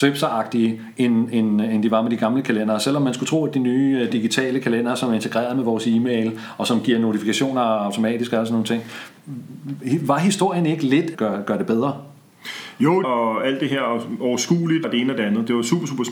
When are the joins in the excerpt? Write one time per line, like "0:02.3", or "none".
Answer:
0:11.1
0:13.0
0:14.8